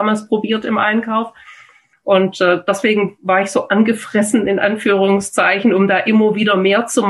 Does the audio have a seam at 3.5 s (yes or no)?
no